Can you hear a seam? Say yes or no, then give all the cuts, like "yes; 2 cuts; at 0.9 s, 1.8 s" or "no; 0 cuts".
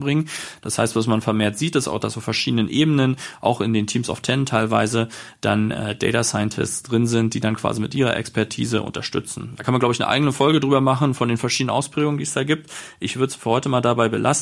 no; 0 cuts